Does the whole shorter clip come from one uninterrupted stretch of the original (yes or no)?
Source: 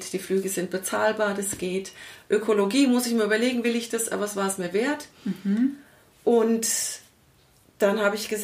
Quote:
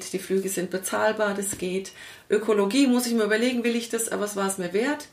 yes